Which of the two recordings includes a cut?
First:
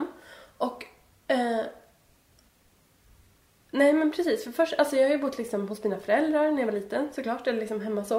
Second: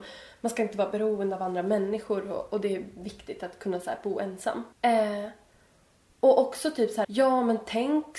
second; 2 cuts; at 4.7 s, 7.0 s

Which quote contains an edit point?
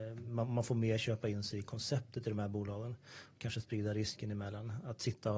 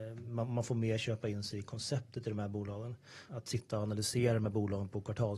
second; 1 cut; at 3.3 s

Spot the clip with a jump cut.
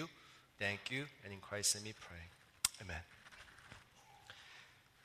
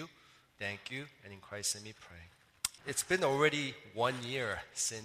second; 1 cut; at 2.8 s

